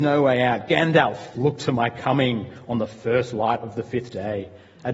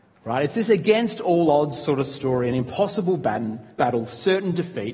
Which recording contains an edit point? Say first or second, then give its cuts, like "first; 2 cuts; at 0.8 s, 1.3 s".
first; 1 cut; at 1.3 s